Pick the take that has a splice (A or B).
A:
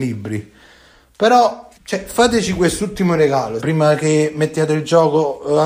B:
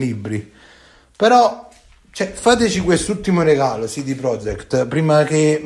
A